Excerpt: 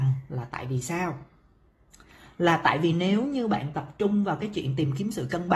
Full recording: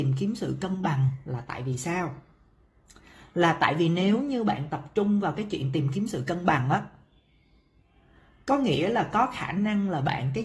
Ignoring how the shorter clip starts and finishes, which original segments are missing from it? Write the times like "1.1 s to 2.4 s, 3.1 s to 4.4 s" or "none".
none